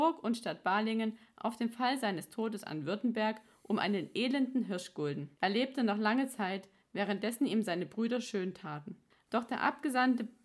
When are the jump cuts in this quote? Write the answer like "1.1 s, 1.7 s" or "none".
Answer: 5.3 s, 9.3 s

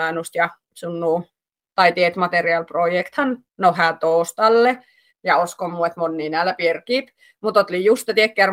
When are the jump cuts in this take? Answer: 5.1 s

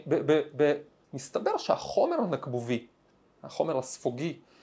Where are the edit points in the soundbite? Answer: 1.0 s

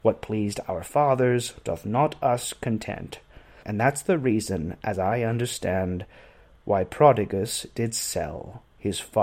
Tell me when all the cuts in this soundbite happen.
3.6 s

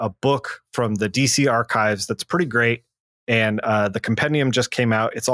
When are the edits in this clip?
none

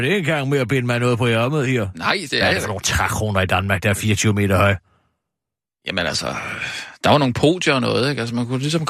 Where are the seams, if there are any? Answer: none

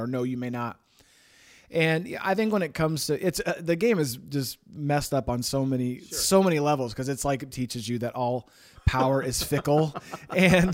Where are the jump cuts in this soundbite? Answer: 7.5 s

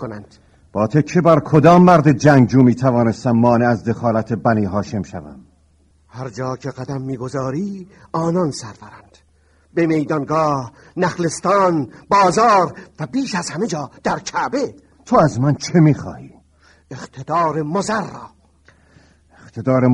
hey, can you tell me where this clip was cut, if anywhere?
5.9 s

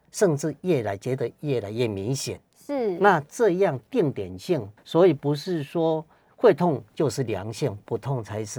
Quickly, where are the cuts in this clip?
4.8 s

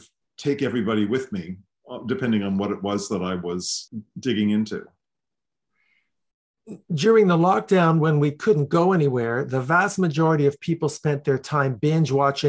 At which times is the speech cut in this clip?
none

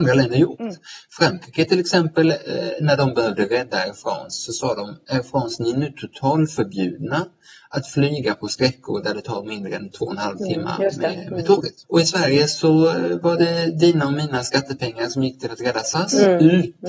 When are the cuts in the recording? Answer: 11.8 s

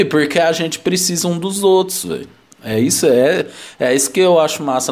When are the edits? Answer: none

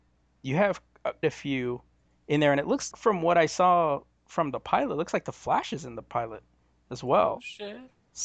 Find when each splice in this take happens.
1.2 s, 2.9 s

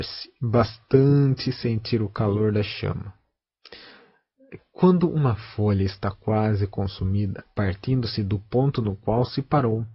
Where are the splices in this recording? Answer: 4.6 s, 7.4 s

